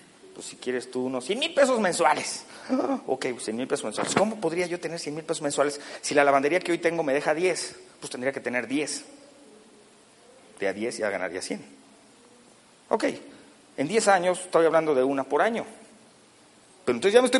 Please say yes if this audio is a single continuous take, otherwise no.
yes